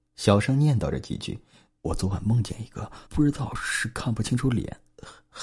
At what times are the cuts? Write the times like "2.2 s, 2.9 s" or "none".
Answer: 1.8 s, 3.1 s